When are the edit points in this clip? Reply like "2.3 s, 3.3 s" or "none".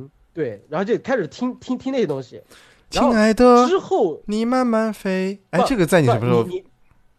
none